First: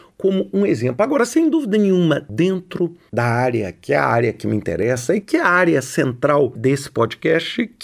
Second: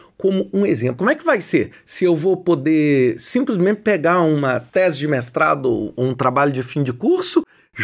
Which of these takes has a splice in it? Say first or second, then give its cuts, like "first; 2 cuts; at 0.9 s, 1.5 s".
second; 1 cut; at 1.0 s